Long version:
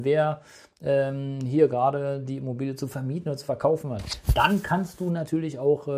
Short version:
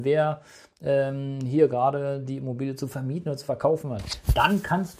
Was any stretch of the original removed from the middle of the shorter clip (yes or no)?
no